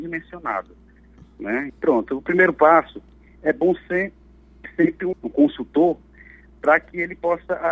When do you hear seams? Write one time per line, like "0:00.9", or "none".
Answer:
0:01.7
0:05.1